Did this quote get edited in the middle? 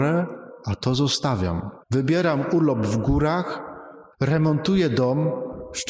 yes; 2 cuts; at 1.8 s, 4.1 s

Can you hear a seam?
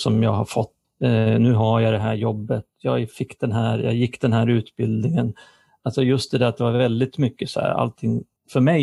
no; 0 cuts

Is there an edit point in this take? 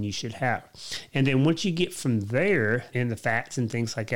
yes; 1 cut; at 2.9 s

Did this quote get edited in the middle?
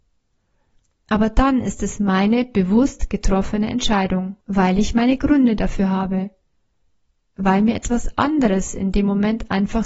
yes; 1 cut; at 4.4 s

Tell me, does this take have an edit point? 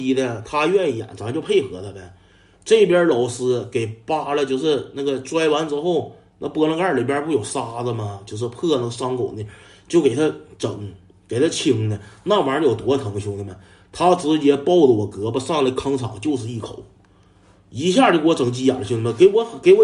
no; 0 cuts

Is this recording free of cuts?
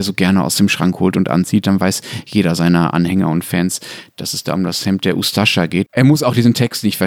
no; 1 cut; at 5.9 s

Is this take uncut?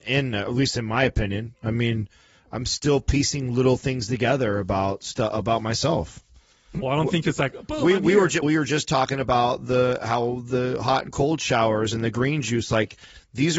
no; 2 cuts; at 6.8 s, 8.4 s

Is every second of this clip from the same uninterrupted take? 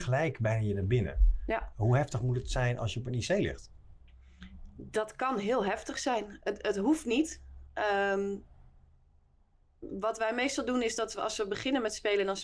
yes; 0 cuts

